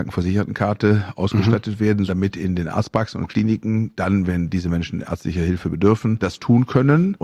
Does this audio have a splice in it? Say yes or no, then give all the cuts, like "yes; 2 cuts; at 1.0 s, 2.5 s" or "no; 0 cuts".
yes; 2 cuts; at 2.1 s, 6.2 s